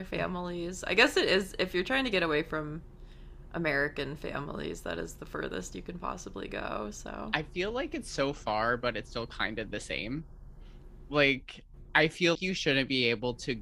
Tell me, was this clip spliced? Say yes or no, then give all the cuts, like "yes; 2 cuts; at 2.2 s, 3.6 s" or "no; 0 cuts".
yes; 1 cut; at 12.3 s